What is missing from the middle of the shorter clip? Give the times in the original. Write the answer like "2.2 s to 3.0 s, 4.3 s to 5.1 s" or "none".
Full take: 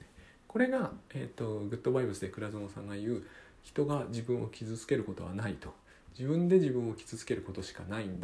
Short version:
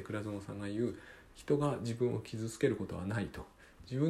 none